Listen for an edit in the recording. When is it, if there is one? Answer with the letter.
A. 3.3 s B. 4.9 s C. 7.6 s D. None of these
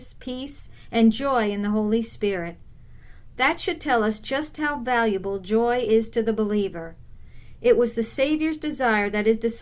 C